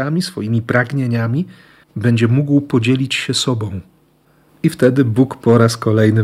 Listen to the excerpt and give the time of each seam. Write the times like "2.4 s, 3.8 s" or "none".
4.5 s